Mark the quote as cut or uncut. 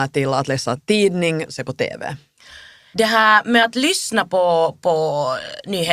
cut